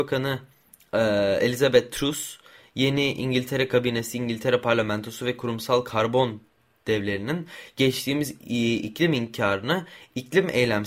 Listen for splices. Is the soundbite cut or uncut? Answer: uncut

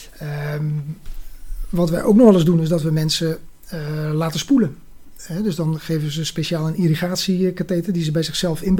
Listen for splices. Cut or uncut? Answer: uncut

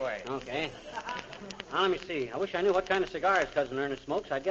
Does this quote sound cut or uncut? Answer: uncut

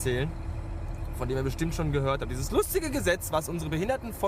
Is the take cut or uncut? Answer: uncut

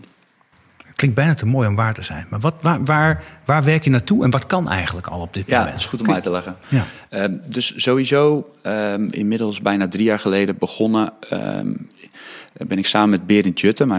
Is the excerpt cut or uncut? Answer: cut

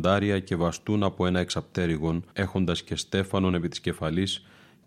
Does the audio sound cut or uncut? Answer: cut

